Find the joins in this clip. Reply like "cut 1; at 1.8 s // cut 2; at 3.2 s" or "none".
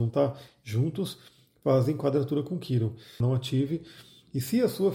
cut 1; at 3.2 s